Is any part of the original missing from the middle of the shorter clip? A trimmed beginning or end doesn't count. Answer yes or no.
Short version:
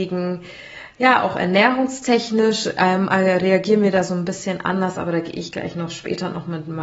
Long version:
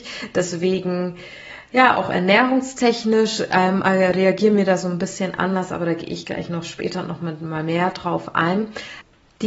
no